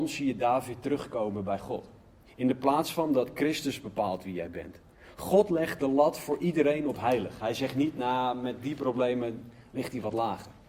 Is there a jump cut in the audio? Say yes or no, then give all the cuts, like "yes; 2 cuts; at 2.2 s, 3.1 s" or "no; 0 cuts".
yes; 1 cut; at 2.2 s